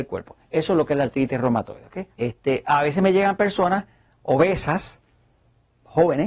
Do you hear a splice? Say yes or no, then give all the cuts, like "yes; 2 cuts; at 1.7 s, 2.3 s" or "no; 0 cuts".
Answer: yes; 1 cut; at 2.2 s